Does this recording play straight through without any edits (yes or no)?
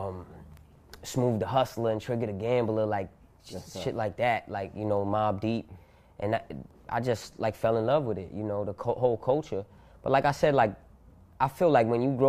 yes